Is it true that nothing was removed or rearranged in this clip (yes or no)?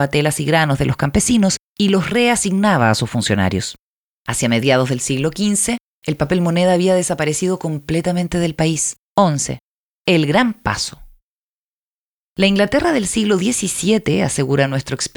no